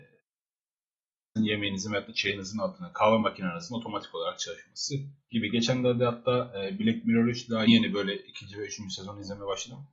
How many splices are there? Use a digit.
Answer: 2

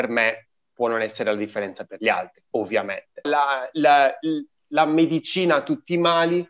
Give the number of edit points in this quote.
1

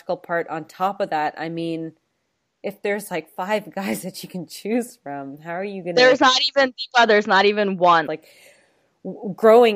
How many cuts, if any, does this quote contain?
1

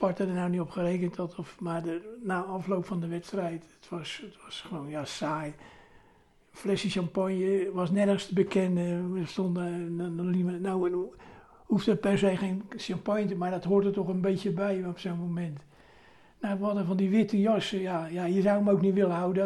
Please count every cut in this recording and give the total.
0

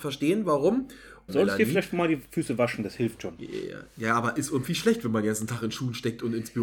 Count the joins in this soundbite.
1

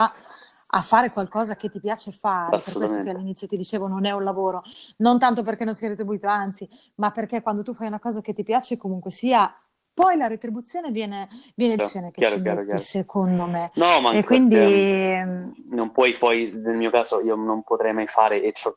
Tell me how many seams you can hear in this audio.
1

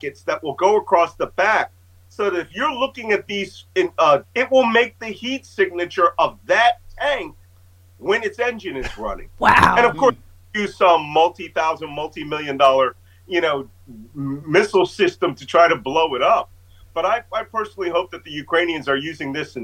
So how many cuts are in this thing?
1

